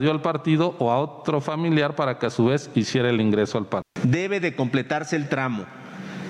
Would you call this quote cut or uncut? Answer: cut